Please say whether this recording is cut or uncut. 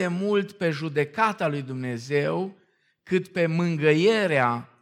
uncut